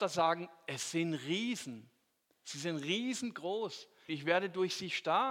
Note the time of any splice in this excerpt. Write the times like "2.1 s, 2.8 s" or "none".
4.1 s